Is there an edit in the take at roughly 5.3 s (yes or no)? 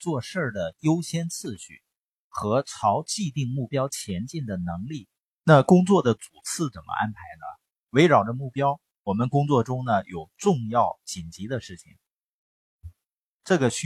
yes